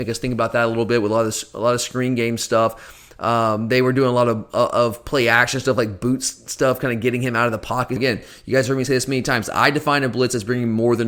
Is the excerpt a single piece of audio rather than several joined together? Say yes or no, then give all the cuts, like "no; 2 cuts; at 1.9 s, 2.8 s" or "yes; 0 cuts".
no; 1 cut; at 8.0 s